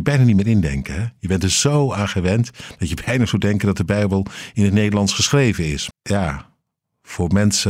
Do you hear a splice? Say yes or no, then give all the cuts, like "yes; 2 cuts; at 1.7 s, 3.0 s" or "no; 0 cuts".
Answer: yes; 1 cut; at 5.9 s